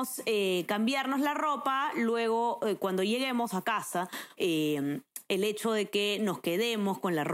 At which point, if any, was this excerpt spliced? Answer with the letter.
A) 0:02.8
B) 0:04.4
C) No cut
B